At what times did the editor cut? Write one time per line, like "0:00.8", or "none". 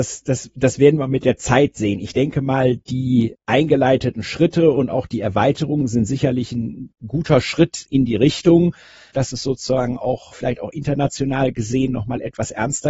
0:07.9
0:10.3